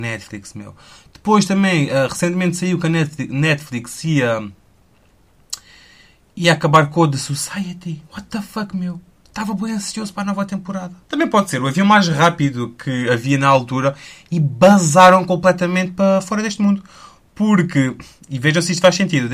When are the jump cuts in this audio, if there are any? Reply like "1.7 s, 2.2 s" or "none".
11.0 s